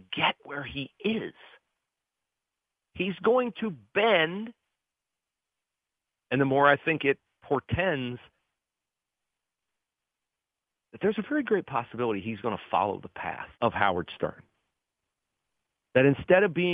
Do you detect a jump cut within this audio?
yes; 2 cuts; at 6.2 s, 13.5 s

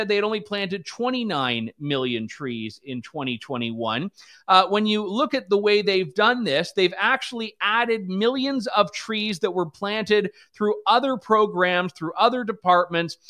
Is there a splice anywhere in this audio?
no; 0 cuts

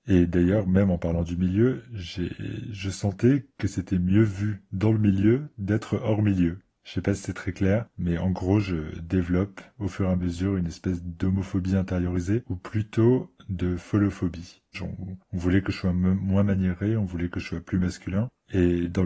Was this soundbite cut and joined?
yes; 1 cut; at 14.7 s

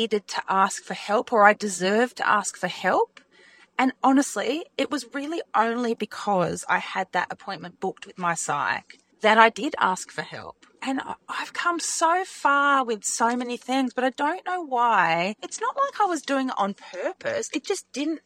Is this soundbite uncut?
yes; 0 cuts

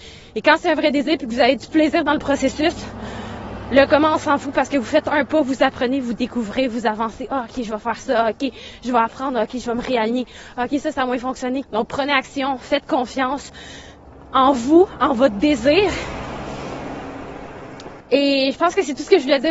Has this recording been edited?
yes; 2 cuts; at 11.6 s, 18.0 s

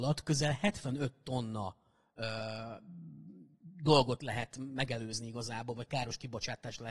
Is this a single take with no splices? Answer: yes; 0 cuts

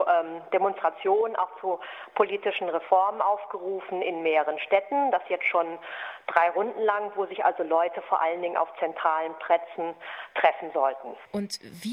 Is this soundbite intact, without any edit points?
yes; 0 cuts

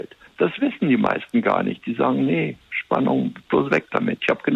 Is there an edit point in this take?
no; 0 cuts

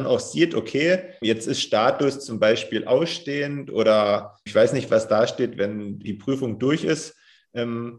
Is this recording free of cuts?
no; 3 cuts; at 1.2 s, 4.5 s, 6.0 s

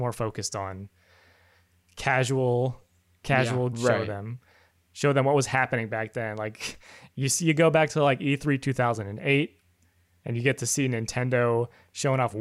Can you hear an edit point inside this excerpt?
yes; 1 cut; at 3.7 s

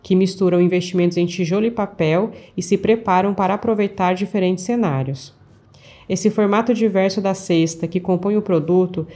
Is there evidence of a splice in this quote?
no; 0 cuts

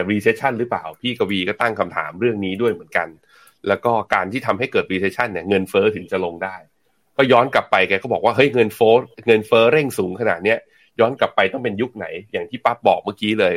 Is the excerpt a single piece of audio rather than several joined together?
yes; 0 cuts

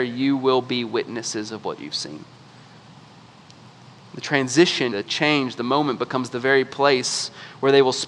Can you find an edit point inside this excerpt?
yes; 1 cut; at 4.9 s

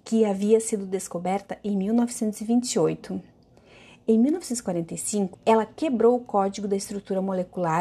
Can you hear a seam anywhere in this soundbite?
yes; 1 cut; at 5.3 s

